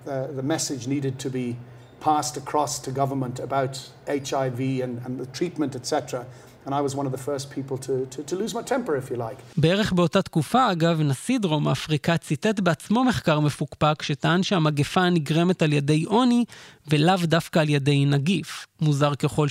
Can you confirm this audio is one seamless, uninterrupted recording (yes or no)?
yes